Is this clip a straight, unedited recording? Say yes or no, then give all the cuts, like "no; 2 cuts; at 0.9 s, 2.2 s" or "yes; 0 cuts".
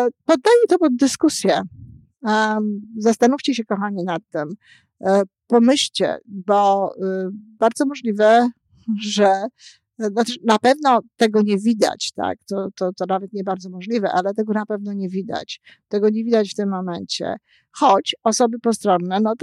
yes; 0 cuts